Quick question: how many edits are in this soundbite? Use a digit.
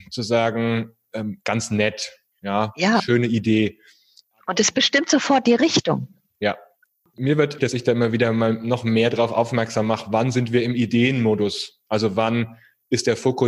1